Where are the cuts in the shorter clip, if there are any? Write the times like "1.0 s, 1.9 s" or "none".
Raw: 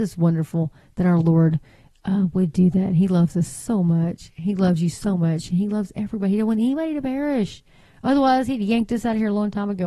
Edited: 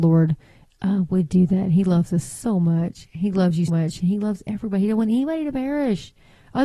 3.7 s